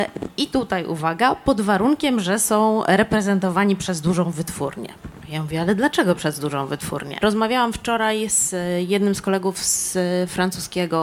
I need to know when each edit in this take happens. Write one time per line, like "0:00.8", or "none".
0:07.2

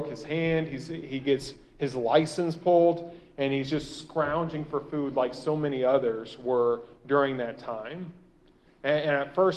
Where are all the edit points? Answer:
0:08.7

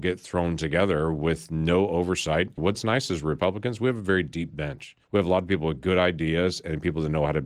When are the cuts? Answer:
0:02.6
0:05.0

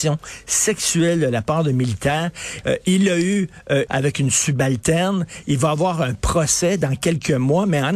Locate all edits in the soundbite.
0:02.6
0:03.9

